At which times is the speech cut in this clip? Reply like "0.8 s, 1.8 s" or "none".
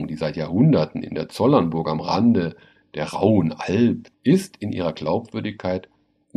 4.1 s